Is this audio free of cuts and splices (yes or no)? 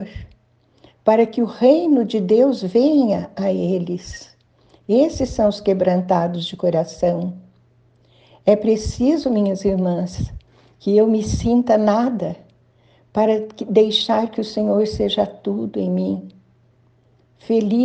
yes